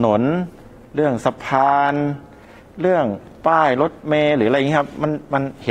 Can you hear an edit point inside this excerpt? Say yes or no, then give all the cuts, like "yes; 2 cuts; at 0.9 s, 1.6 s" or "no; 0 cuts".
no; 0 cuts